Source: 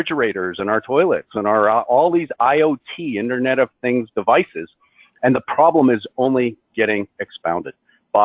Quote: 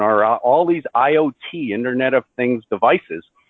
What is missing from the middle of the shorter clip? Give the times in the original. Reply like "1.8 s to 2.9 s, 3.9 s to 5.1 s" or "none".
none